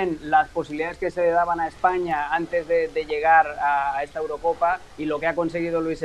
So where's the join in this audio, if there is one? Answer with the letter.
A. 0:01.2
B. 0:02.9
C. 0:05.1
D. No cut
D